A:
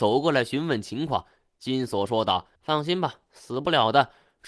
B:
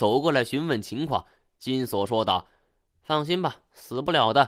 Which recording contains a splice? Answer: A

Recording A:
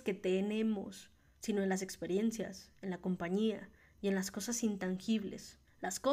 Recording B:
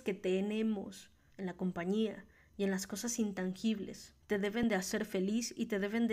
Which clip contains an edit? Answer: B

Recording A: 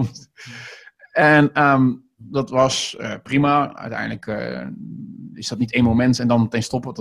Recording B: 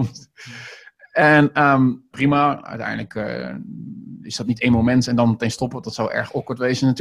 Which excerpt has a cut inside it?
B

